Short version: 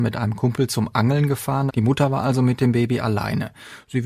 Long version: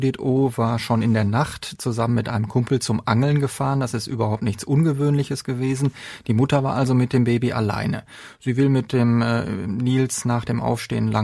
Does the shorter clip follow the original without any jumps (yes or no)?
no